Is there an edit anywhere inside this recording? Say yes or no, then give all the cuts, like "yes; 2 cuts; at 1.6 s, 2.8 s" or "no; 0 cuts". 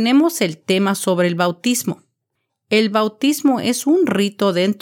no; 0 cuts